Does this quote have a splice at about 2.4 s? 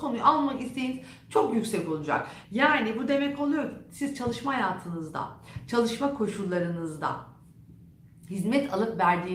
yes; 1 cut; at 2.4 s

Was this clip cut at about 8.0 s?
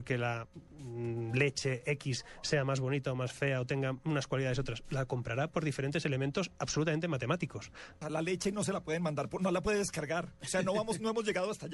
yes; 1 cut; at 8.0 s

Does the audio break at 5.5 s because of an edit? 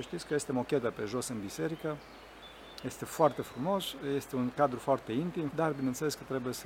yes; 1 cut; at 5.5 s

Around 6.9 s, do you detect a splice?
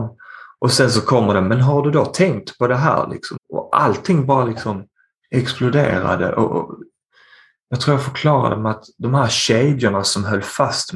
no; 1 cut; at 3.4 s

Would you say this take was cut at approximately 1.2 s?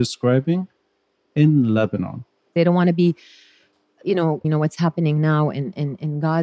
no; 2 cuts; at 2.5 s, 4.4 s

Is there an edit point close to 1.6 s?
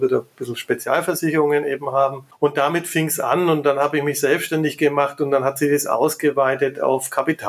no; 0 cuts

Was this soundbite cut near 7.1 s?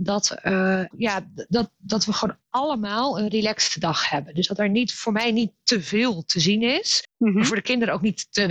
no; 1 cut; at 0.9 s

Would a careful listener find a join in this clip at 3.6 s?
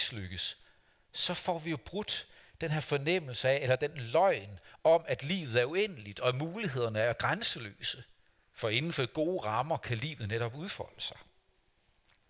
no; 1 cut; at 8.4 s

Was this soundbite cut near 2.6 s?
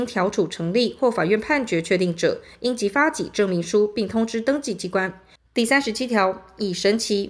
no; 1 cut; at 5.4 s

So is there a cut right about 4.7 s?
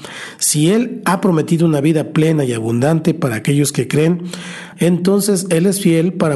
yes; 1 cut; at 4.7 s

